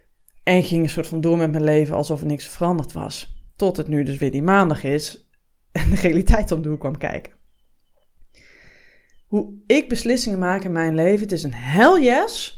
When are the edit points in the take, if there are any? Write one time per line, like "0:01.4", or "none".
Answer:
0:03.5